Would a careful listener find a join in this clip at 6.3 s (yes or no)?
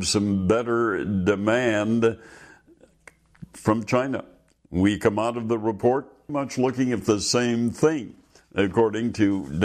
yes